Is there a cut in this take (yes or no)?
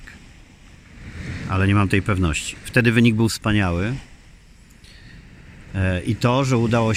no